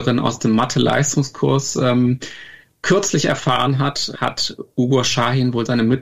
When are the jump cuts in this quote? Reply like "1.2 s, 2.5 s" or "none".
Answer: 4.1 s